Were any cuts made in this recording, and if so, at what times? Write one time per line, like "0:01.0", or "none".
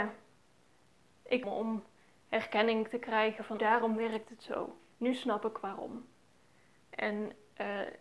0:01.4
0:03.6
0:04.9